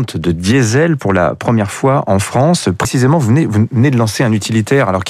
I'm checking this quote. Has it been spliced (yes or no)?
no